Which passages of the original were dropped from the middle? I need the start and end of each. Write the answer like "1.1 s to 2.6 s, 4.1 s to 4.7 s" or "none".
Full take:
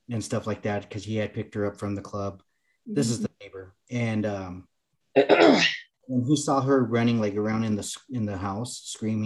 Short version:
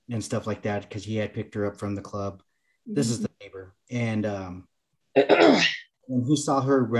none